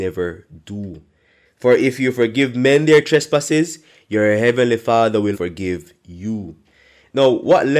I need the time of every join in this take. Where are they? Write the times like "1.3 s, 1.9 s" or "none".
1.4 s, 5.3 s